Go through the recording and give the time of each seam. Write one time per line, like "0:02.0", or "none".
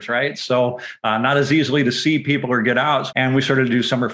0:03.1